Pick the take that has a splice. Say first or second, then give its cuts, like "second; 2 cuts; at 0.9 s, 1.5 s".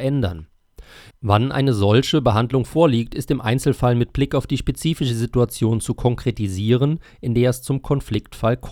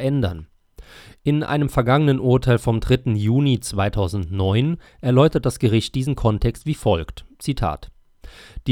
first; 1 cut; at 1.1 s